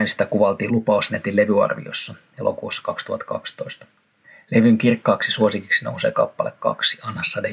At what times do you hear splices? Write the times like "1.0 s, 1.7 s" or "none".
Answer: none